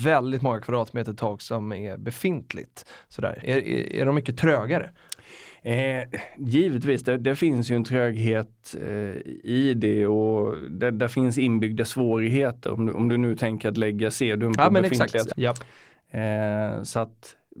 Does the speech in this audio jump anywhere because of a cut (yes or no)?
yes